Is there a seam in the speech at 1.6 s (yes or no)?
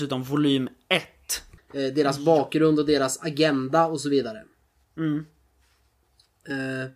yes